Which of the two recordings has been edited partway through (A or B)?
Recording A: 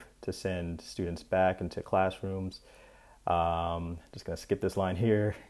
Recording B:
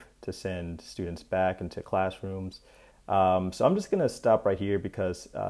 B